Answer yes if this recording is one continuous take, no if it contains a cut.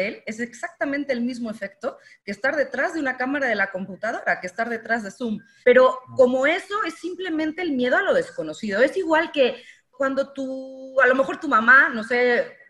no